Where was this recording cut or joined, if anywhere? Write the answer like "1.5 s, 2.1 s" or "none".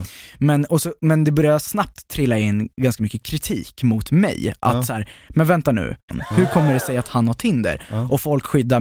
6.1 s